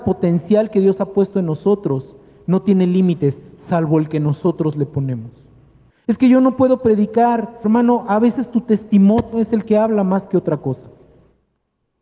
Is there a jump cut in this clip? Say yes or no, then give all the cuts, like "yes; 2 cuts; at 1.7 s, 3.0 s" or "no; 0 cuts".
yes; 2 cuts; at 5.9 s, 7.6 s